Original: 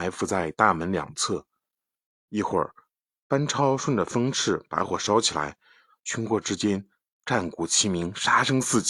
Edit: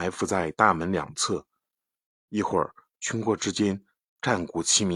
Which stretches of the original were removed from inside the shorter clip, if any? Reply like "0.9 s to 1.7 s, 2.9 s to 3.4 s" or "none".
2.9 s to 6.0 s